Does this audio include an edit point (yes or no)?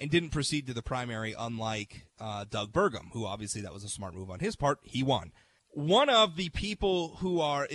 yes